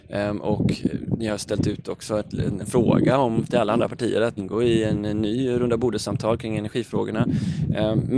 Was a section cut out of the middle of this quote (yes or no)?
yes